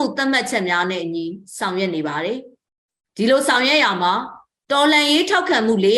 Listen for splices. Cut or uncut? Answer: uncut